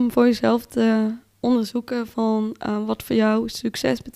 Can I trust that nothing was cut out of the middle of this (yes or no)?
yes